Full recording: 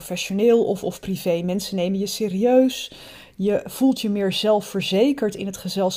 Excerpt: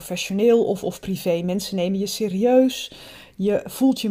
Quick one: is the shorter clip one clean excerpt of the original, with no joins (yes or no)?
yes